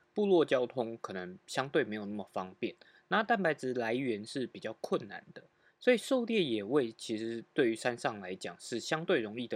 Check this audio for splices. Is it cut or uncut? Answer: uncut